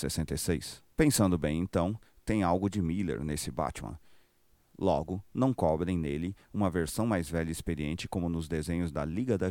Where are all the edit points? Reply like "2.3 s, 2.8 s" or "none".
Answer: 0.9 s